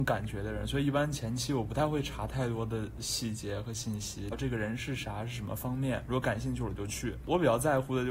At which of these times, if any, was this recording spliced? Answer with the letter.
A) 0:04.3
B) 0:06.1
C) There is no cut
A